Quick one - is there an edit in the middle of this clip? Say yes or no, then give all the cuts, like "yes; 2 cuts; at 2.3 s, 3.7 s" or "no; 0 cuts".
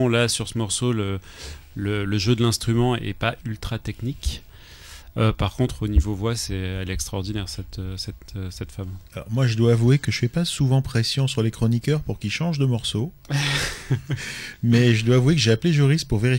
yes; 1 cut; at 9.1 s